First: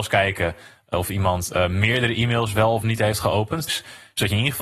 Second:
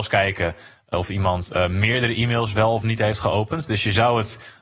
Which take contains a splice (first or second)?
first